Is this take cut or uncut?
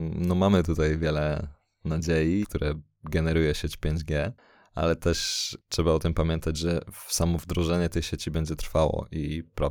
cut